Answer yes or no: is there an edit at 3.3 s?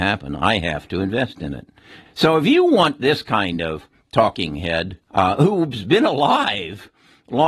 no